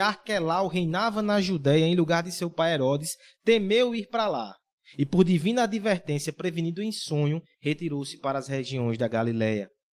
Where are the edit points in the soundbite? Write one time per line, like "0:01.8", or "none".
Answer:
none